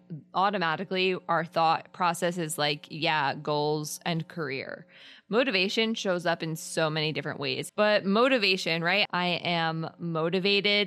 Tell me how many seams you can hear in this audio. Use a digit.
2